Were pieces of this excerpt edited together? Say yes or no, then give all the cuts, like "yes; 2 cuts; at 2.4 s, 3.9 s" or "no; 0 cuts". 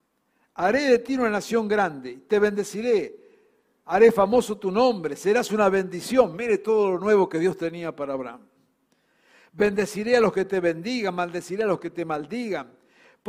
no; 0 cuts